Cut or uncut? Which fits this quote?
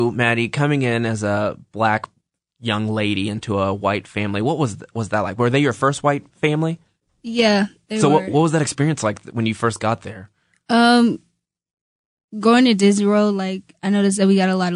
uncut